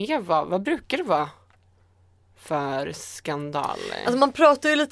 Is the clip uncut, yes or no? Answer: yes